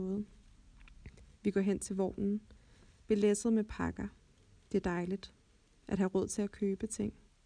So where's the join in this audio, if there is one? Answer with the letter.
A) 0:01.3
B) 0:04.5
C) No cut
A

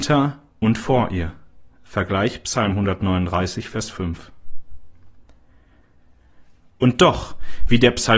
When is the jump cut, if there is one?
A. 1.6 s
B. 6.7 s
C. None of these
B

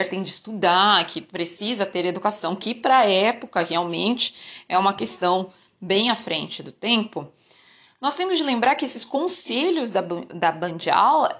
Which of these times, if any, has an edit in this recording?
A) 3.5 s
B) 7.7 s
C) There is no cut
C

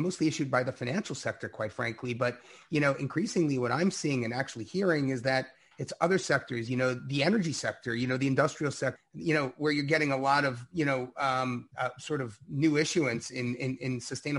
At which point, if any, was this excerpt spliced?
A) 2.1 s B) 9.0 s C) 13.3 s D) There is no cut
B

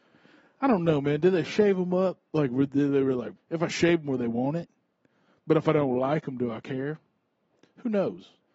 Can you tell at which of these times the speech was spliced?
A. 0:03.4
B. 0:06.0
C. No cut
A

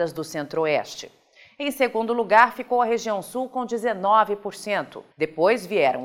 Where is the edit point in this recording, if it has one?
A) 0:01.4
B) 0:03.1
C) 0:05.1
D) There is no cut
C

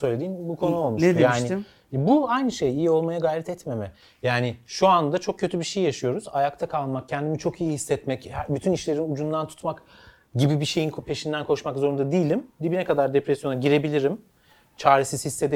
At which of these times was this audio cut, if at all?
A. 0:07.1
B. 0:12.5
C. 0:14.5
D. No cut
D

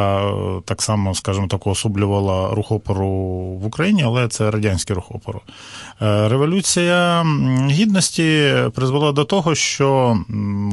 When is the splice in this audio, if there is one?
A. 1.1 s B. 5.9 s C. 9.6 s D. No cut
D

